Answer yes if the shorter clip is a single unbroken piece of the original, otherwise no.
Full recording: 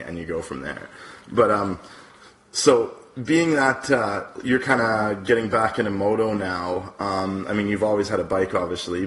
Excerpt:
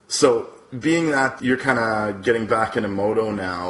no